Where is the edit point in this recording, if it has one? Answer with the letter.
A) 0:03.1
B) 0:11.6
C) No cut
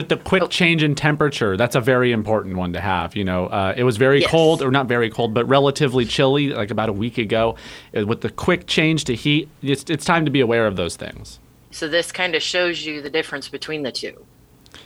B